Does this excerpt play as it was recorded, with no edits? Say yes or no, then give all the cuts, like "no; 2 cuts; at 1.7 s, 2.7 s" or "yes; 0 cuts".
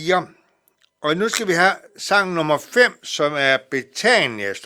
yes; 0 cuts